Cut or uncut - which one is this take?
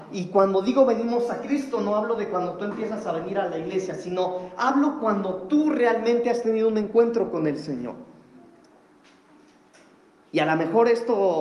uncut